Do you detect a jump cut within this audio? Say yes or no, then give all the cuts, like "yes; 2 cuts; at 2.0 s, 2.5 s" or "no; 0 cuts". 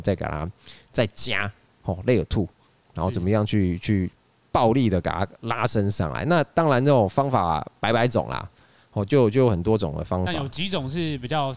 no; 0 cuts